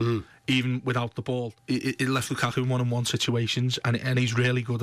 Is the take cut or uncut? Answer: cut